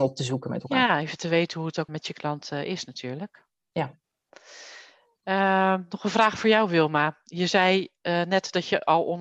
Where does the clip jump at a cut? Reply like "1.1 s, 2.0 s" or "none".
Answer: 1.9 s